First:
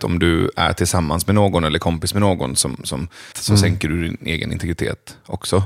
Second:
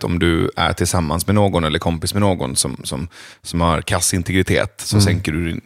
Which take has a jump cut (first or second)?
first